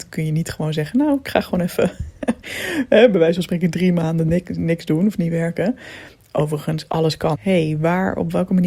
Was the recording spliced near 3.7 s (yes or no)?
no